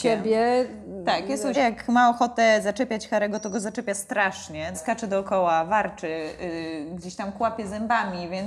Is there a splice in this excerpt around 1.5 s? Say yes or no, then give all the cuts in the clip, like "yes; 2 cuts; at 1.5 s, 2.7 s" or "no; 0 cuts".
yes; 2 cuts; at 1.5 s, 4.7 s